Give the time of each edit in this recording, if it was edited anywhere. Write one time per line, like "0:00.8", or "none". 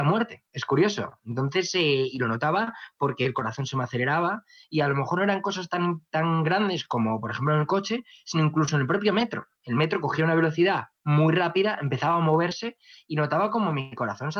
none